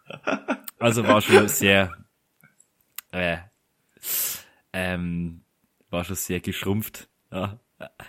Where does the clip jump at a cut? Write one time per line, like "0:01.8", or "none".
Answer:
none